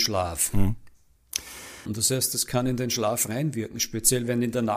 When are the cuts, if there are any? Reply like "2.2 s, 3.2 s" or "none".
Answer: 1.8 s